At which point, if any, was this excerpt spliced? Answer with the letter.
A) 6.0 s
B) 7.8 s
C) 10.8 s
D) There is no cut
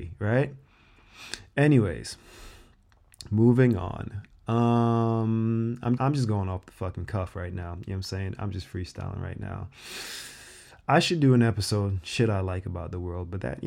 A